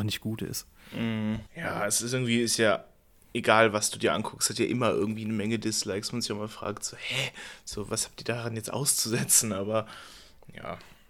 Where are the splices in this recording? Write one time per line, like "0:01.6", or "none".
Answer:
0:01.5